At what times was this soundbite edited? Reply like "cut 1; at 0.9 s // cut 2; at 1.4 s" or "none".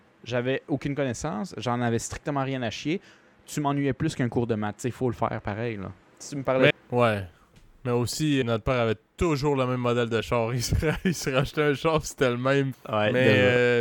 cut 1; at 6.7 s // cut 2; at 8.4 s // cut 3; at 12.7 s